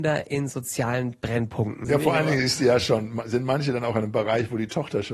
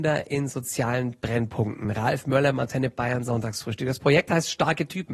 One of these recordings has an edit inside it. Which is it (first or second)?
first